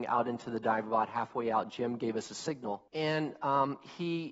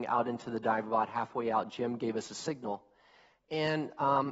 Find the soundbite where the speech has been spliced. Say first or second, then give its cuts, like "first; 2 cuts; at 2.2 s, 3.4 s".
first; 1 cut; at 2.9 s